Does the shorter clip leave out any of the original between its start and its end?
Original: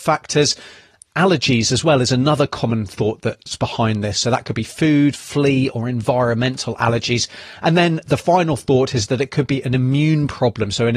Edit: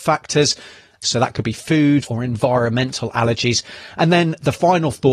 yes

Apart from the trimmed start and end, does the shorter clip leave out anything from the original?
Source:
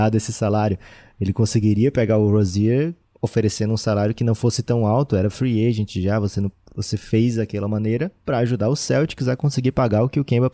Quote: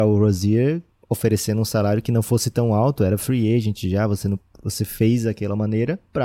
no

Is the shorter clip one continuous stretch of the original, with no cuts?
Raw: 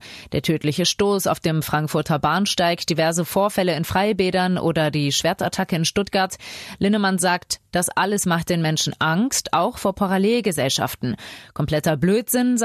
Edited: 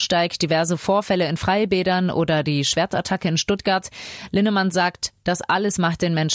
yes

